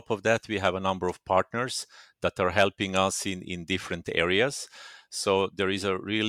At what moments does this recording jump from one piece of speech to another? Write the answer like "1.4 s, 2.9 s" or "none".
none